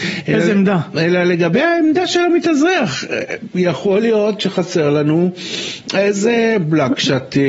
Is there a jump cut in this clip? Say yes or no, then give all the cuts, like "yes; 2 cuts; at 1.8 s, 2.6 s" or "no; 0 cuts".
no; 0 cuts